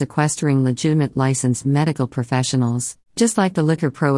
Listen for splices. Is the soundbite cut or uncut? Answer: cut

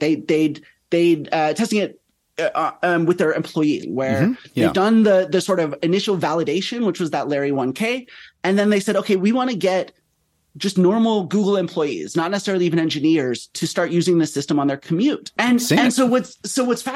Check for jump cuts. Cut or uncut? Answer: cut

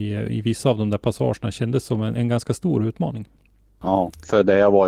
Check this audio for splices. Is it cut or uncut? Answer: cut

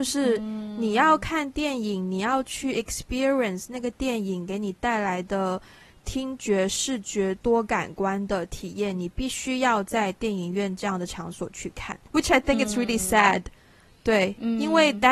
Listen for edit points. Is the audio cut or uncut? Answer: cut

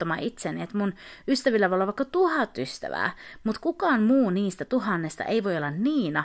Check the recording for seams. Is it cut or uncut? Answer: uncut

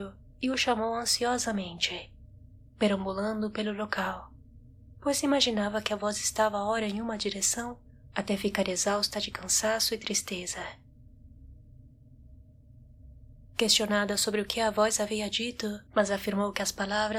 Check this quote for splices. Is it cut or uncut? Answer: cut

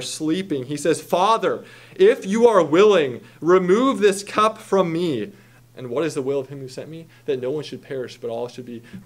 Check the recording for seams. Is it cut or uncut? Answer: cut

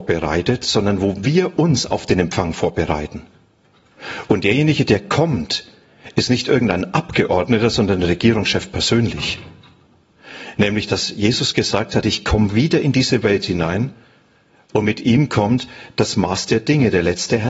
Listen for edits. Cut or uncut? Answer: uncut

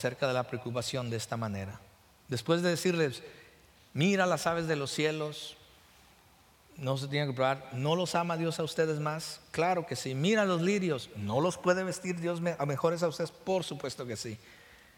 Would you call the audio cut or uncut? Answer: uncut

